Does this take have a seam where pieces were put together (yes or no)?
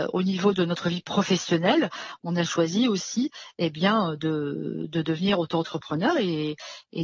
no